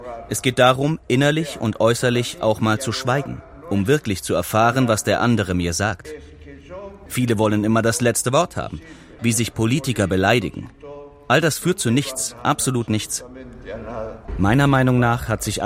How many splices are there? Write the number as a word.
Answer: one